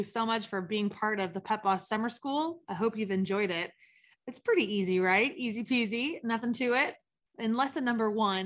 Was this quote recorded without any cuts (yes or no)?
yes